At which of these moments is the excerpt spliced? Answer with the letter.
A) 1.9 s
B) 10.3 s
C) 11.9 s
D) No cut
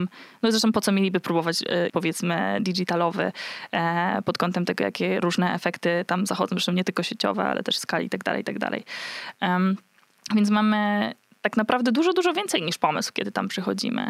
A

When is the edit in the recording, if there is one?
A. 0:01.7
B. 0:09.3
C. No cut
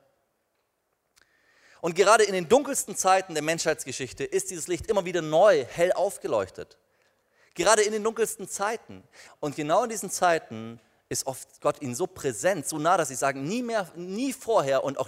B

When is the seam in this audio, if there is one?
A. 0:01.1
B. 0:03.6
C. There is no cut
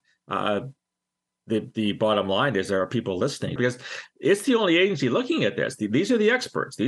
B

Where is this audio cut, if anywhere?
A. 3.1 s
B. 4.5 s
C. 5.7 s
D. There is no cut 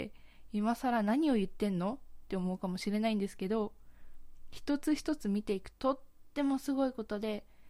C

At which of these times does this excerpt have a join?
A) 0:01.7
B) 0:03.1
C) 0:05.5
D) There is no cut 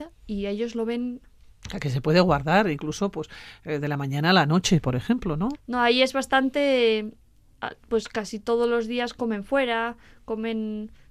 C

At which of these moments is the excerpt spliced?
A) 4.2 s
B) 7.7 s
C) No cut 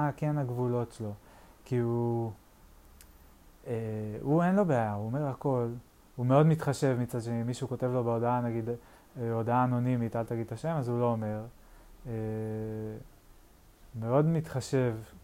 C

